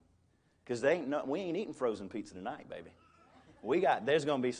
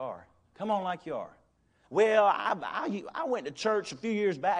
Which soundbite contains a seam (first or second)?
second